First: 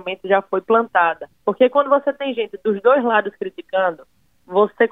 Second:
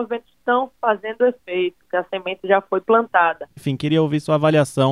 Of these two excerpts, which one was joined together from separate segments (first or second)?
second